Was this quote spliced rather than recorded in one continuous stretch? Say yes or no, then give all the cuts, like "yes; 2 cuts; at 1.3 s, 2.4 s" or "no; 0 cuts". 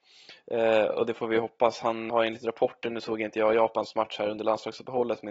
yes; 1 cut; at 2.1 s